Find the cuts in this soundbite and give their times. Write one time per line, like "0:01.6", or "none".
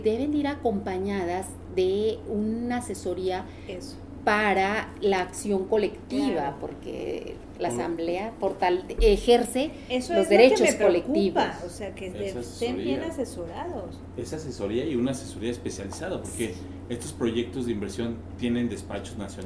none

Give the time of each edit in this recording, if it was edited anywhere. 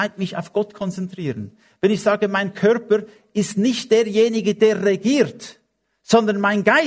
none

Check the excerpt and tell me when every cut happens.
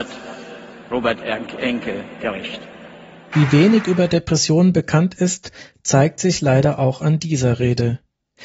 0:03.3

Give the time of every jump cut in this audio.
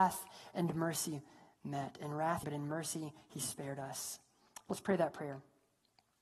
0:02.4

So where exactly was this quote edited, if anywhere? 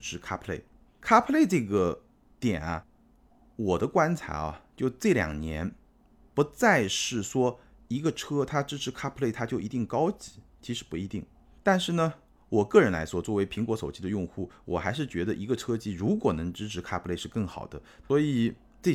0:18.0

